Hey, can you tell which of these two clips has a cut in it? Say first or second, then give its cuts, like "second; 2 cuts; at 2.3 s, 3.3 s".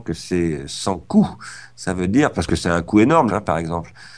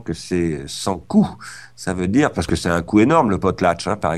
first; 1 cut; at 3.3 s